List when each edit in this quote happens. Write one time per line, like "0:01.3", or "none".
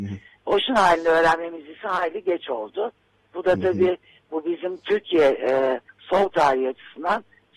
0:05.9

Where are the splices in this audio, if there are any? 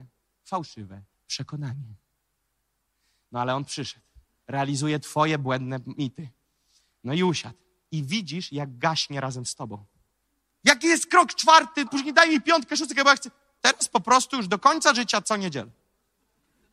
0:10.6
0:11.9
0:13.6

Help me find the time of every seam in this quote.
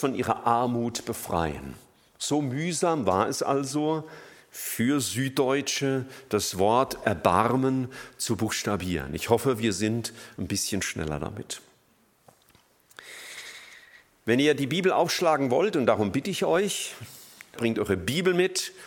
0:17.6

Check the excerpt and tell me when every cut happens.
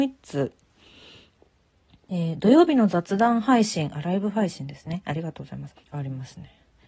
0:05.8

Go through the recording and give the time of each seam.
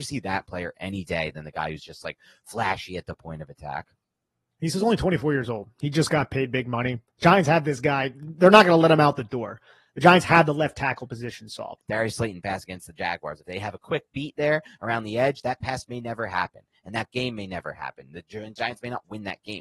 0:11.8

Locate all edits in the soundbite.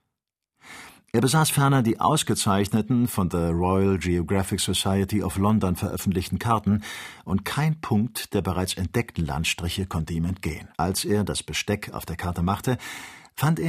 0:10.7

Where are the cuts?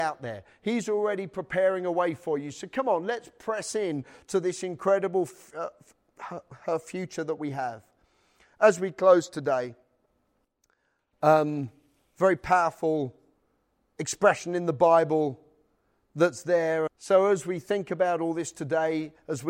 0:16.9

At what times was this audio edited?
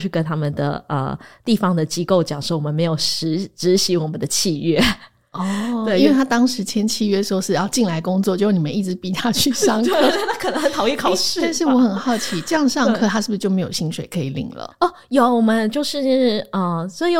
none

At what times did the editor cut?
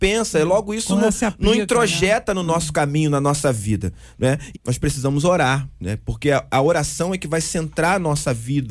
0:04.5

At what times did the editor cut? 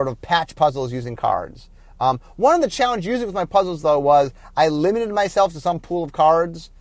none

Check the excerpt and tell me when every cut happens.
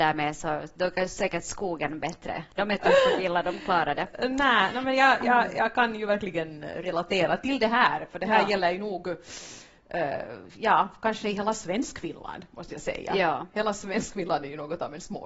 0:02.5

